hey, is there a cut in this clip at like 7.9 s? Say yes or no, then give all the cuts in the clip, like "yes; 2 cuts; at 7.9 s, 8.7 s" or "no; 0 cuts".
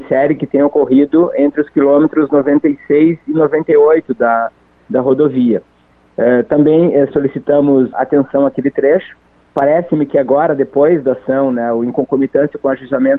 yes; 1 cut; at 7.9 s